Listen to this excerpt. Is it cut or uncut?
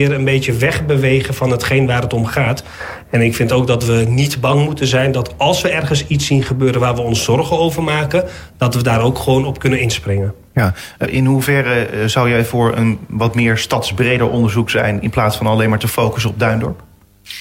cut